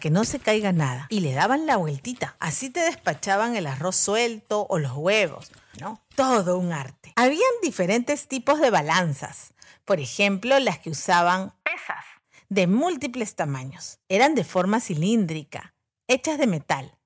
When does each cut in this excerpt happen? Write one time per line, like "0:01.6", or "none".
0:05.7